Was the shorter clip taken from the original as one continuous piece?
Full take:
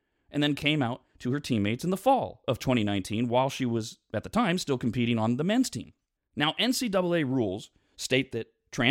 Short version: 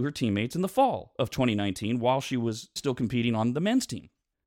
no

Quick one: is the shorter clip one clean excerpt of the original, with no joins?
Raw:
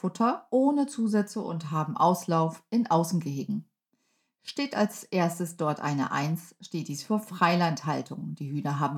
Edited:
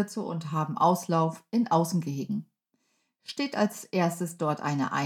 yes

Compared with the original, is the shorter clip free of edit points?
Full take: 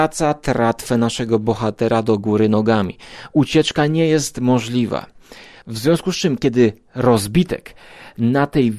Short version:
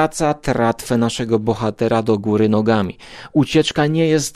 yes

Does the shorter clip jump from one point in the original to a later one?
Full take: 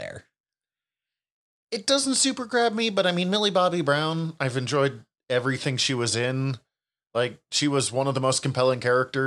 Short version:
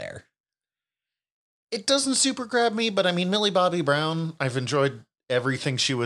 no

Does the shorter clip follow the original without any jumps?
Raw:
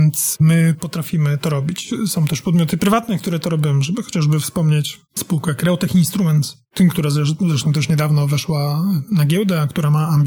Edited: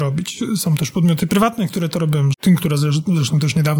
no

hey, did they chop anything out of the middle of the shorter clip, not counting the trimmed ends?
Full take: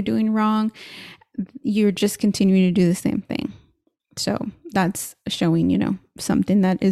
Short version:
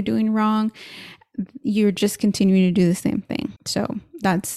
yes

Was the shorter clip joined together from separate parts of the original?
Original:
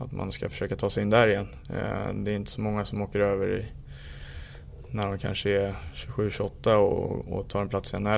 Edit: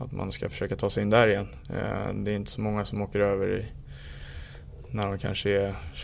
no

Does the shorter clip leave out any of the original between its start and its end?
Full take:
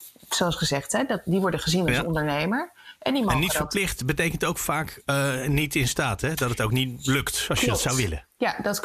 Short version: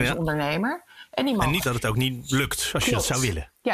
yes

